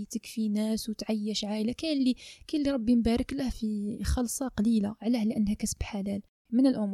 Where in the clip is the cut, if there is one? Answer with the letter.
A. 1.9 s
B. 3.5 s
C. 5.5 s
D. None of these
B